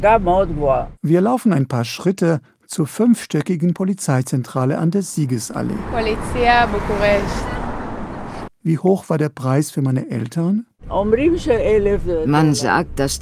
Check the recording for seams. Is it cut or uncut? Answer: cut